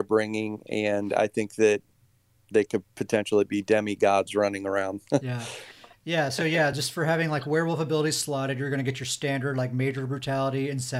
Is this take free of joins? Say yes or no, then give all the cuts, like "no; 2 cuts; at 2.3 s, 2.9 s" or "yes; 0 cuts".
yes; 0 cuts